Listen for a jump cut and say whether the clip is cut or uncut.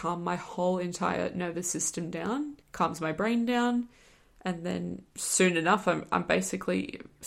cut